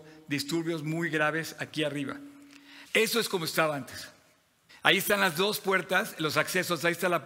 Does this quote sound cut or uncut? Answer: cut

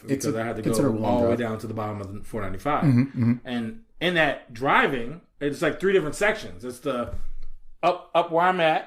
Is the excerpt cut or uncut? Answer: uncut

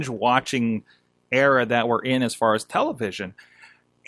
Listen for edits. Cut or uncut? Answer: uncut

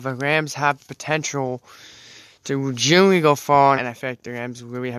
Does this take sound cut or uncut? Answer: cut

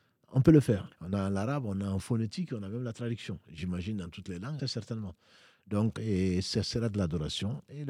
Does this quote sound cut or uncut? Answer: cut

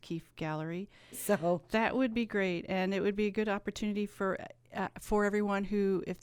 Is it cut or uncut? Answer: cut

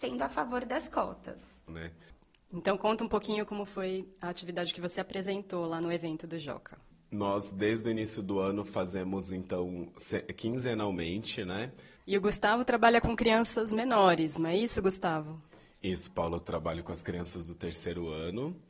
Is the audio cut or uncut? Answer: cut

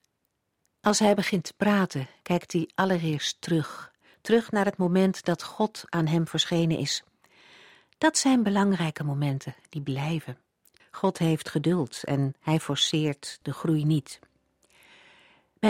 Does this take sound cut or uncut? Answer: cut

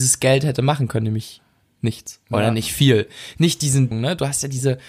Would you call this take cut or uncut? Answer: cut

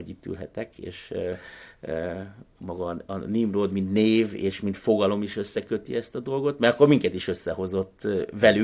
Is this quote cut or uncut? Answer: uncut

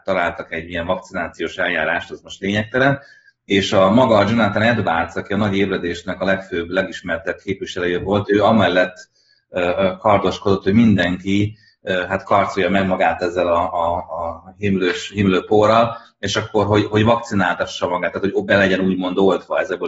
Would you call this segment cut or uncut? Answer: uncut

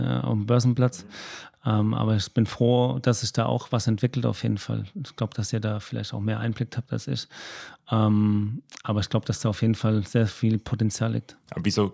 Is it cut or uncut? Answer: cut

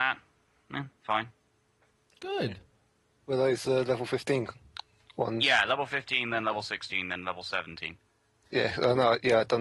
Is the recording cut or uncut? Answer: uncut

